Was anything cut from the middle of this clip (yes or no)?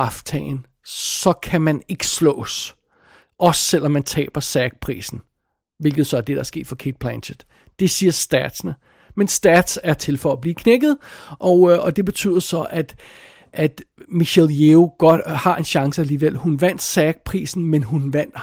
no